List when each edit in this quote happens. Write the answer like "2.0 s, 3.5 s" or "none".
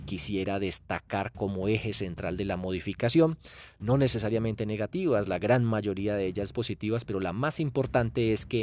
6.5 s